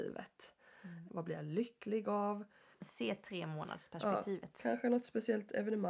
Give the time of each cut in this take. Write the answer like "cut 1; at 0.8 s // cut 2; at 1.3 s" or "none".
cut 1; at 1.1 s // cut 2; at 2.7 s

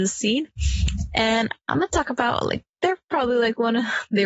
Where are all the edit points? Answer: none

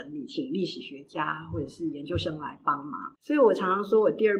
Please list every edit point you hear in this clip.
cut 1; at 3.2 s

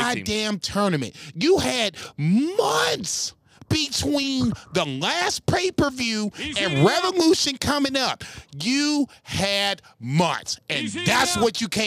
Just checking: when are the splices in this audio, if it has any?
none

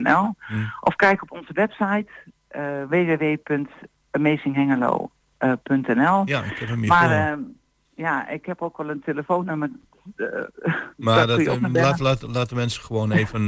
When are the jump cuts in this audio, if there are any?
none

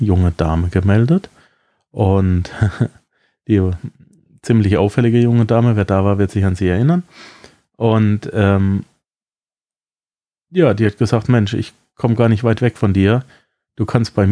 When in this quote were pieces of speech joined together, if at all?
none

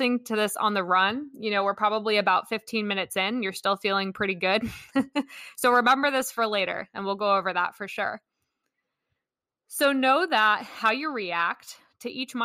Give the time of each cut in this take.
none

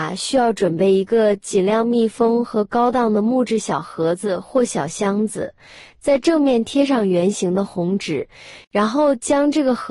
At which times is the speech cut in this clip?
cut 1; at 8.6 s

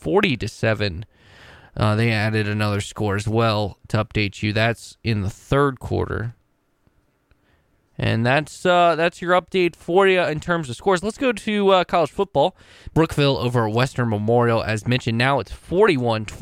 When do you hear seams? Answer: cut 1; at 12.9 s

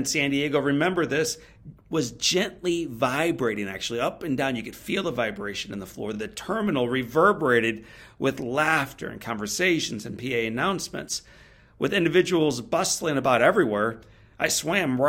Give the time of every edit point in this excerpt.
none

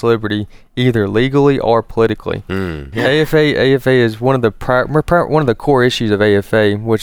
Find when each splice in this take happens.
cut 1; at 2.9 s

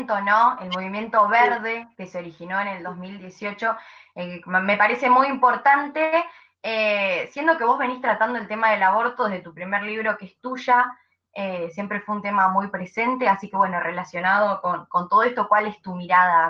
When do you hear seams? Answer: none

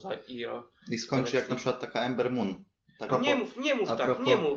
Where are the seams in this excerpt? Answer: cut 1; at 3.1 s

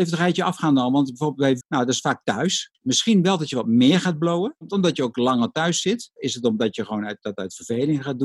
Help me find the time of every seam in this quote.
cut 1; at 1.6 s // cut 2; at 2.7 s // cut 3; at 6.2 s

